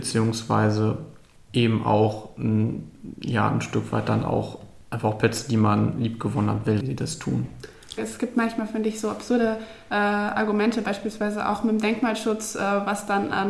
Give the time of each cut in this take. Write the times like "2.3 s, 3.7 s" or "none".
6.8 s, 8.0 s